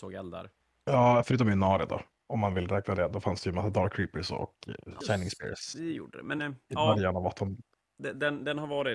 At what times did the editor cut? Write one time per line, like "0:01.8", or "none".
0:05.0
0:06.4